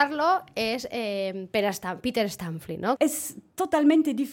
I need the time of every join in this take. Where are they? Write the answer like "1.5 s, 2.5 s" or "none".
3.0 s